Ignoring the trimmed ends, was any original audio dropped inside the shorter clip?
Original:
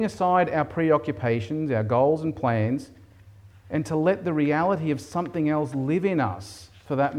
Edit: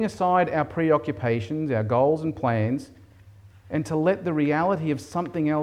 no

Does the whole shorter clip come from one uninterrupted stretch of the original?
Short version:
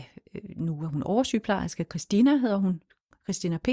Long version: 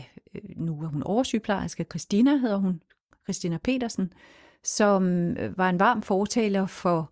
yes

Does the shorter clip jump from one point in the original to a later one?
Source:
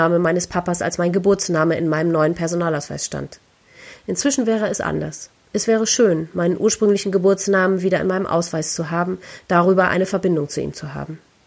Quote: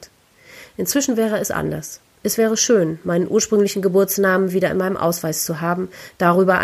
no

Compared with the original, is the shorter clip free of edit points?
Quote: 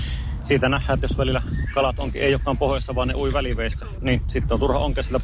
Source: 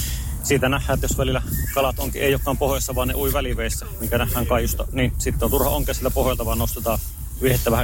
no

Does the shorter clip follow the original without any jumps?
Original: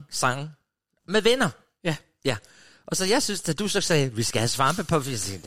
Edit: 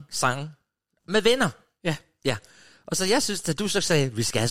yes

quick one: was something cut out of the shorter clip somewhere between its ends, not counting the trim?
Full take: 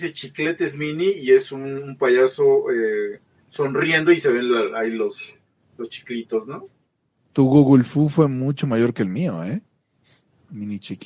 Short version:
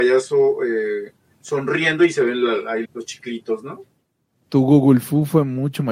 yes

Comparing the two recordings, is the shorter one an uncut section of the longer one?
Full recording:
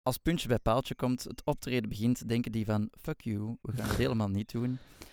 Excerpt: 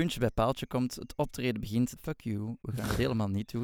no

